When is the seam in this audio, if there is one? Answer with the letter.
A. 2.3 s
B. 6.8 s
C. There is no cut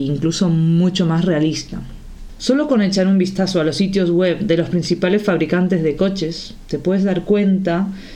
A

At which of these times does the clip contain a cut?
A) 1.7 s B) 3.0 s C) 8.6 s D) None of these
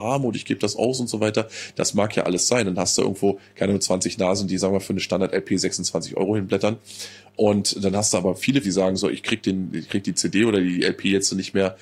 C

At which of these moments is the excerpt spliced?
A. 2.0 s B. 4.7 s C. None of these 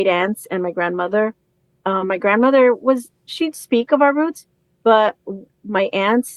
C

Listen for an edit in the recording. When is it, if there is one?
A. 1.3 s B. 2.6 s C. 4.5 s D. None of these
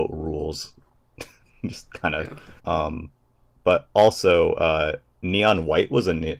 B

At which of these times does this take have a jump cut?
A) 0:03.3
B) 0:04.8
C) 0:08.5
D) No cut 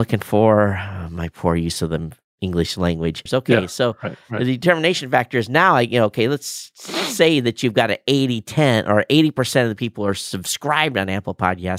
A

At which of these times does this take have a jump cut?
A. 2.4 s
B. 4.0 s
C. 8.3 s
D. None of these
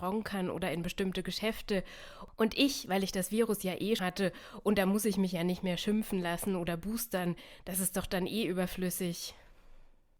B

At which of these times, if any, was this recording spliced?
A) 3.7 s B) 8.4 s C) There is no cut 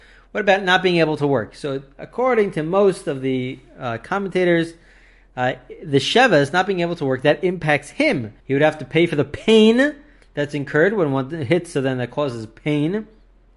B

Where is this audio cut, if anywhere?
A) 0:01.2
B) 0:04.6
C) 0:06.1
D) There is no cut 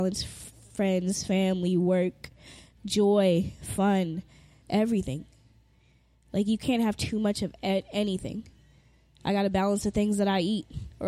B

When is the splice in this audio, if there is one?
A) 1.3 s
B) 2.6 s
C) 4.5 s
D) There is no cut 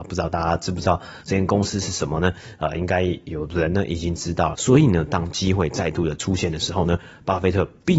C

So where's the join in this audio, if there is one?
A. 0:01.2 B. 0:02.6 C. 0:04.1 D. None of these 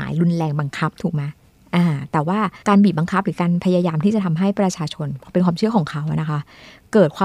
B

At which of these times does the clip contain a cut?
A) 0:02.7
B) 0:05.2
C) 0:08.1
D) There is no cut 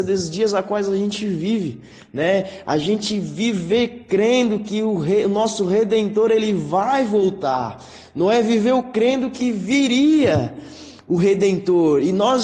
D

